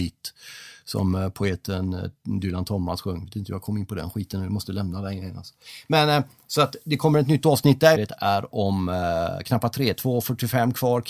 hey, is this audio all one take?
no; 2 cuts; at 7.9 s, 9.4 s

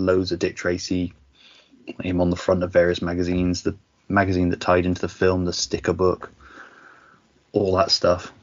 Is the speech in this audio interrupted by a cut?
no; 0 cuts

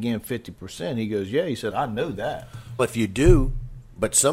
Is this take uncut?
no; 2 cuts; at 1.7 s, 2.8 s

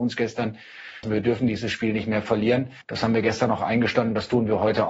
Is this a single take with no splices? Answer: no; 2 cuts; at 1.0 s, 2.8 s

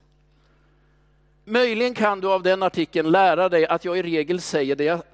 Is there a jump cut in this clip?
yes; 1 cut; at 1.5 s

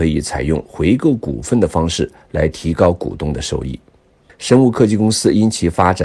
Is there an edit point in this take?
yes; 1 cut; at 4.3 s

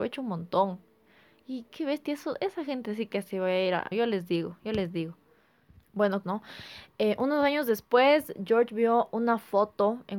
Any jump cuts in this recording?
yes; 2 cuts; at 3.9 s, 6.2 s

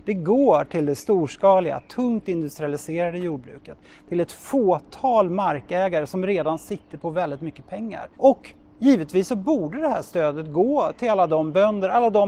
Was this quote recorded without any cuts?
no; 1 cut; at 8.1 s

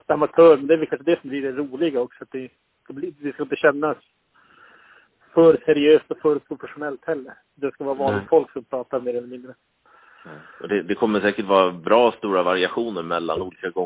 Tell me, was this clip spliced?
no; 0 cuts

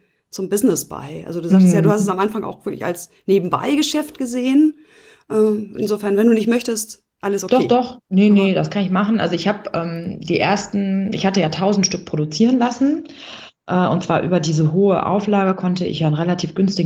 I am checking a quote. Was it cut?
no; 0 cuts

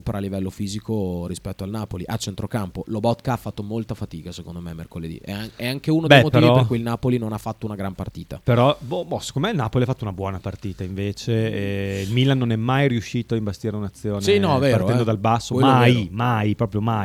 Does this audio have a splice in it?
no; 0 cuts

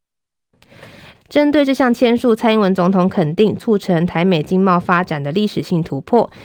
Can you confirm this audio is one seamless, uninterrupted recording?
no; 1 cut; at 1.1 s

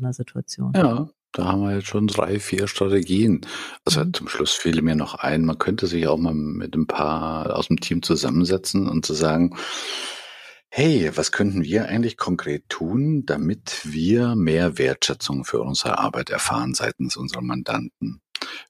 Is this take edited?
yes; 2 cuts; at 2.1 s, 6.3 s

